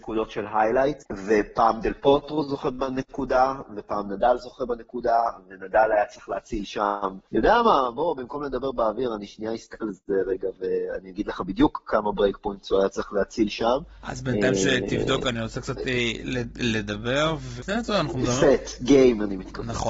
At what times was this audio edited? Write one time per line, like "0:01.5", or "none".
0:07.3
0:17.6